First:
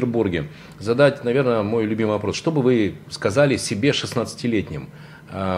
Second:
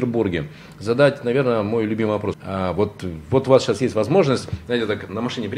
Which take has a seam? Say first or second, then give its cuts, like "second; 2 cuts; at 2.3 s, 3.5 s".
second; 1 cut; at 2.3 s